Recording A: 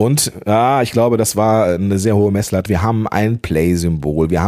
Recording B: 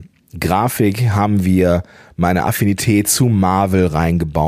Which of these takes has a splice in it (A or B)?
A